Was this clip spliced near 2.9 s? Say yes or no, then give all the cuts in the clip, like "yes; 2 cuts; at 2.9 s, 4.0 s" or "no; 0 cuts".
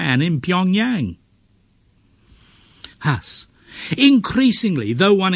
yes; 1 cut; at 2.9 s